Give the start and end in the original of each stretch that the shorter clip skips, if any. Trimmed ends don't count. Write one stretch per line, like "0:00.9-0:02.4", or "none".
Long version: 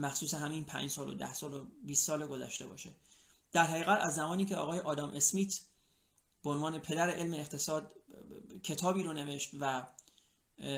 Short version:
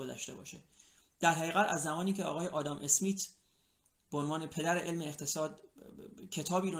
none